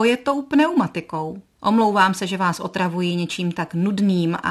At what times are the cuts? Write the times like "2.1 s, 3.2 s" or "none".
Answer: 1.6 s